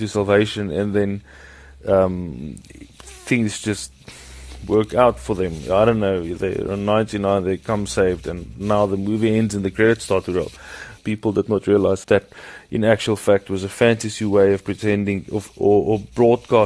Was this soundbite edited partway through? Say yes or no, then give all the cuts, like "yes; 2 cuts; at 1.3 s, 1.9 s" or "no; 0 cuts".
yes; 3 cuts; at 11.0 s, 12.0 s, 15.5 s